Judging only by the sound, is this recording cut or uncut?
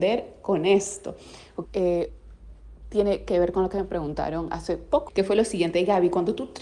cut